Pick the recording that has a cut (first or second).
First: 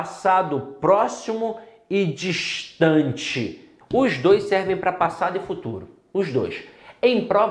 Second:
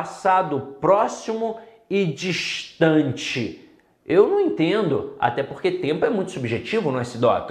first